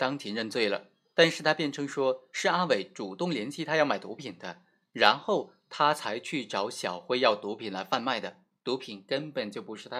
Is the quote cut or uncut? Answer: uncut